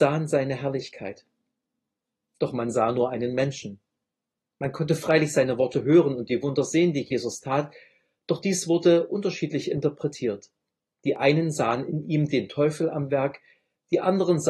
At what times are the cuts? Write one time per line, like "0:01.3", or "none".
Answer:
none